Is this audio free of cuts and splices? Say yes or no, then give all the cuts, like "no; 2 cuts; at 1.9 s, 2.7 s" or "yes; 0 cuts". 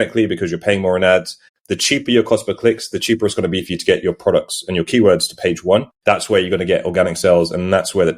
no; 2 cuts; at 1.5 s, 5.9 s